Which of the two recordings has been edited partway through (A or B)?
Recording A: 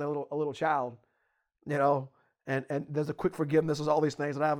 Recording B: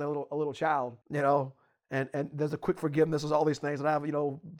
B